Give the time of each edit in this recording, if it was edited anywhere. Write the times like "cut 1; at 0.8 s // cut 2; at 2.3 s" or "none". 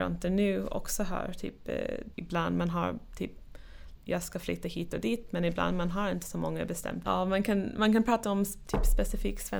cut 1; at 2.1 s // cut 2; at 4.0 s // cut 3; at 7.0 s